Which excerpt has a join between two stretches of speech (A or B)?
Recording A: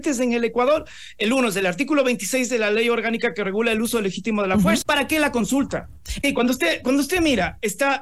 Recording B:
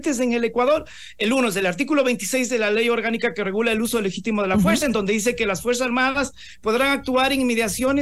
A